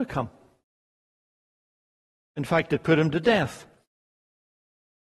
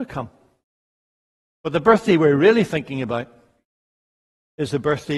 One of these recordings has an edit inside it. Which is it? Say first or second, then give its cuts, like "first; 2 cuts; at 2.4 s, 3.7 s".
second; 1 cut; at 1.5 s